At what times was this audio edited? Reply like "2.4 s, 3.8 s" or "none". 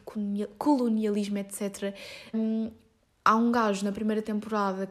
2.3 s